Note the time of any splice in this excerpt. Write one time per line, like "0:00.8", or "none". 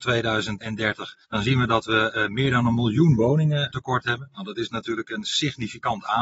0:01.2